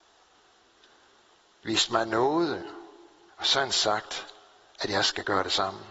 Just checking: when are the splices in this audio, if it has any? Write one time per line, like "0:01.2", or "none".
0:03.3